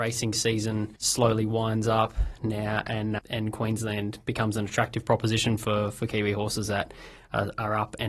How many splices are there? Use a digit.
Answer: 2